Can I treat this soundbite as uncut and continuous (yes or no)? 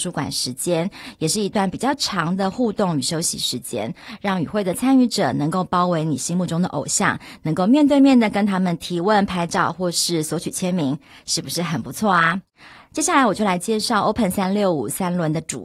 yes